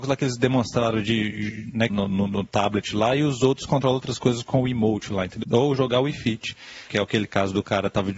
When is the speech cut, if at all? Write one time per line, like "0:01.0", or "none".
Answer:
0:01.9
0:05.4
0:06.9